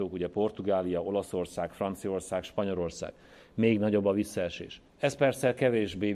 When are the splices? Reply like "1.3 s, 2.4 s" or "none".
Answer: 4.9 s